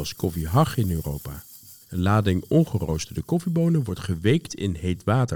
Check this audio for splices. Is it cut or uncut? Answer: cut